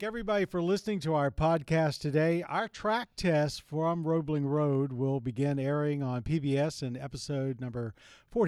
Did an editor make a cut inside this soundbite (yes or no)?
no